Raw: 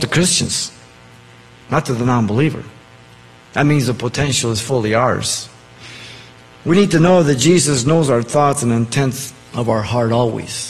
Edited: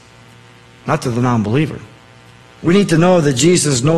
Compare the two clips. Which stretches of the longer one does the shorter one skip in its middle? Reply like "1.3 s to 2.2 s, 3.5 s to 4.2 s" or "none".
3.3 s to 6.4 s